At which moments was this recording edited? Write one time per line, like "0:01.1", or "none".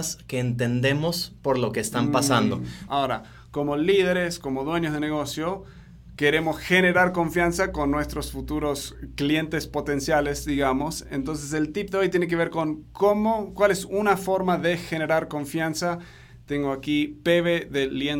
0:02.9